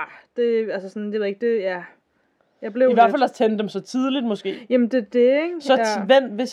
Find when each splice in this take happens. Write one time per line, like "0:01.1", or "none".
none